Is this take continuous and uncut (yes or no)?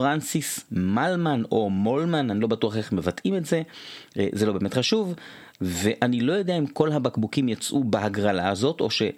no